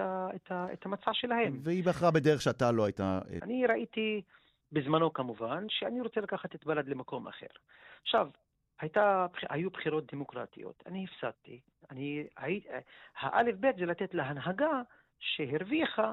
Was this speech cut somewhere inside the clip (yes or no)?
yes